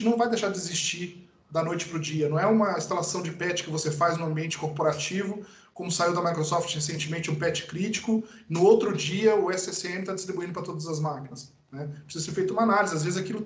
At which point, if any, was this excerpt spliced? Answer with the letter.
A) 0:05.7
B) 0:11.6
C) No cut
C